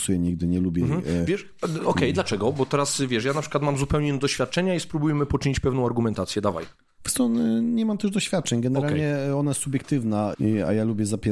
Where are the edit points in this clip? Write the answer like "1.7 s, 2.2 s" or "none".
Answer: 10.3 s